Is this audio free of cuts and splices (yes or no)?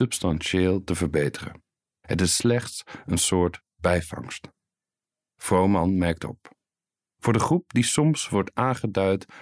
no